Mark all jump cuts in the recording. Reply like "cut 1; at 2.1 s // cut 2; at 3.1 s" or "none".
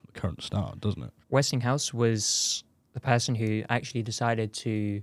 cut 1; at 1.2 s